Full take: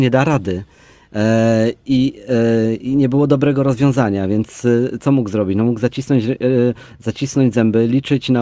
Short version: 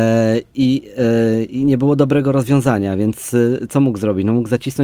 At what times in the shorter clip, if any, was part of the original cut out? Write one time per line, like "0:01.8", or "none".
none